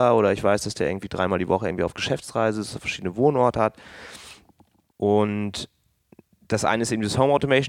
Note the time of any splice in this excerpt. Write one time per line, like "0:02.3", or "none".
0:04.9